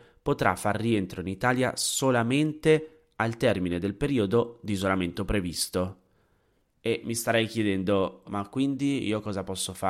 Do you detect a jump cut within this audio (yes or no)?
yes